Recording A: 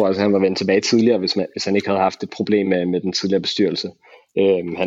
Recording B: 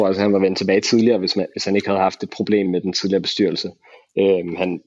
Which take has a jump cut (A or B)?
B